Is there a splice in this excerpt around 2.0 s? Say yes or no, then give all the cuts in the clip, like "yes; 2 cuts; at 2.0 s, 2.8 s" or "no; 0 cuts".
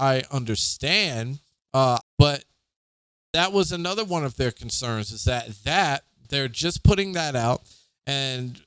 yes; 1 cut; at 2.0 s